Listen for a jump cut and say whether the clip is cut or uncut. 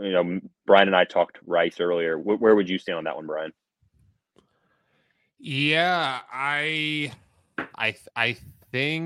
uncut